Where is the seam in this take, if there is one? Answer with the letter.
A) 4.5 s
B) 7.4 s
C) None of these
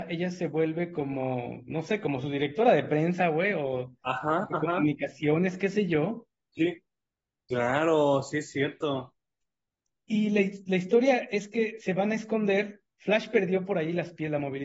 B